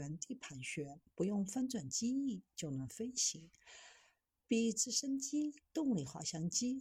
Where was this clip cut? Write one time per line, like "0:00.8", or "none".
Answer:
none